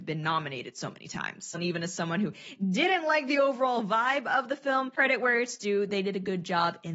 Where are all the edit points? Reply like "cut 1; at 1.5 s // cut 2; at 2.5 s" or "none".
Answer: cut 1; at 1.5 s